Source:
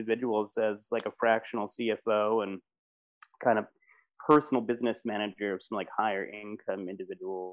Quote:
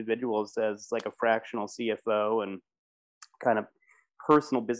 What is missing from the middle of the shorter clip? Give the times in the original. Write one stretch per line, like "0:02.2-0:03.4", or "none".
none